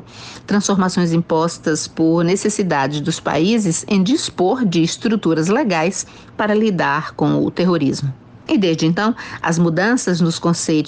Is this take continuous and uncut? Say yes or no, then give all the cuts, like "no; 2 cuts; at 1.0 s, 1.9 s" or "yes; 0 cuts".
no; 1 cut; at 8.5 s